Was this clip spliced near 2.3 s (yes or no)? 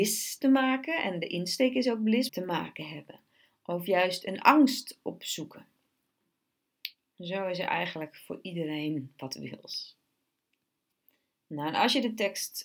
yes